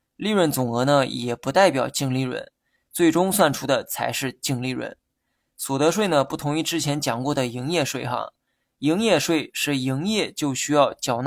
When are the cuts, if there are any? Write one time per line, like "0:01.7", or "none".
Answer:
0:02.8